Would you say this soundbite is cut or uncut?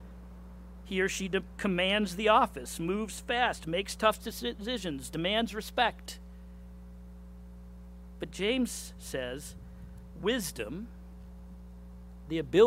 uncut